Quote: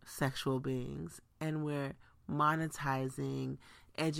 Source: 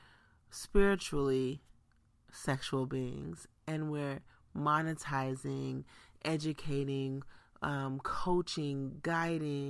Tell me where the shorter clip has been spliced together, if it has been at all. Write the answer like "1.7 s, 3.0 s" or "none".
none